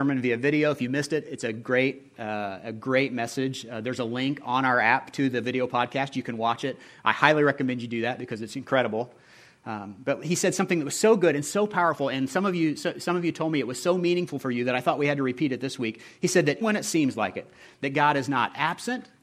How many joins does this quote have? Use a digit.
1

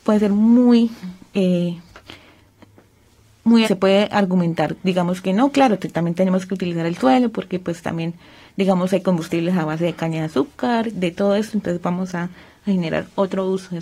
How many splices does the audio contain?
1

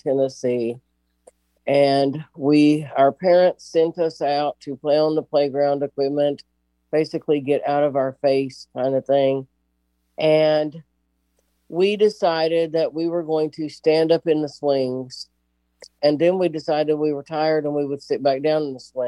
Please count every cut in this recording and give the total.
1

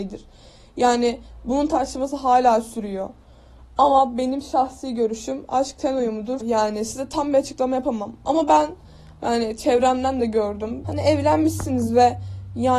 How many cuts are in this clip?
2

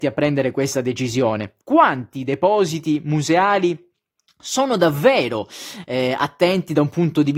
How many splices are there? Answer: 1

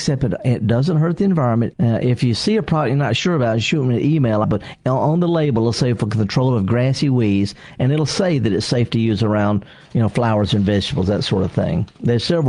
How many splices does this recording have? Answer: 2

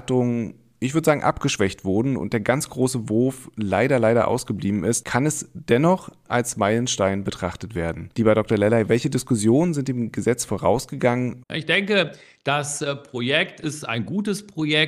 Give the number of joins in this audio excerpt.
1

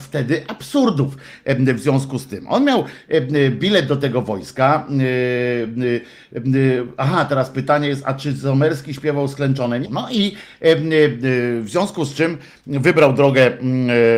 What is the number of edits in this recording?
1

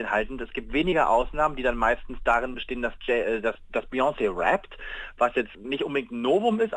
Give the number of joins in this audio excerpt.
1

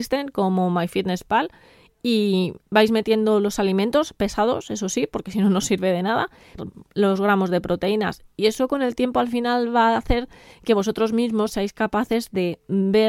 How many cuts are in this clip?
1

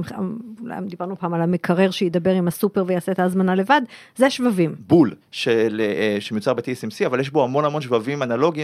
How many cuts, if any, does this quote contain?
2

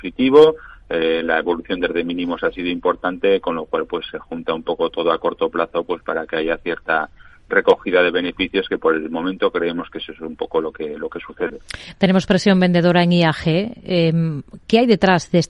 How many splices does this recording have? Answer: 0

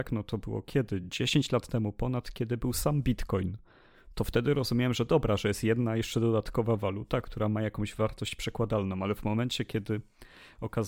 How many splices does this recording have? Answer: 0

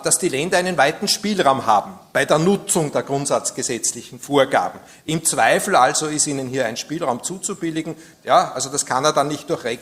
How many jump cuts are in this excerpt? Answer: 1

